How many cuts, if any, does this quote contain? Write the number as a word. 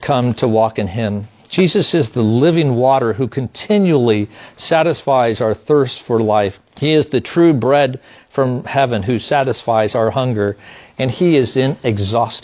one